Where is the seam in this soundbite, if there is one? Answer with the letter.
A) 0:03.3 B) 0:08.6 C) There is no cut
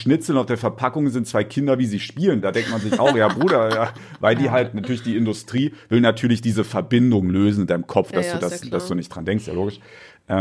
C